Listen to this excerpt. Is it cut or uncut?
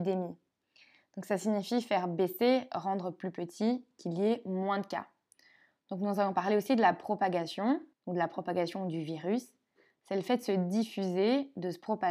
cut